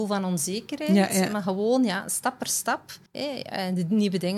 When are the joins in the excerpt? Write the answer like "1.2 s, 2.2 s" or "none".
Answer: 3.1 s